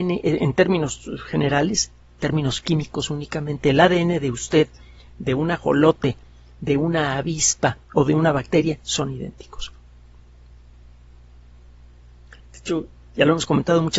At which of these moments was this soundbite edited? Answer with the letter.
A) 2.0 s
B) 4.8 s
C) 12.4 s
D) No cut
C